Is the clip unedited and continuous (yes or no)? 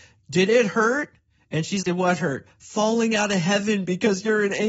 no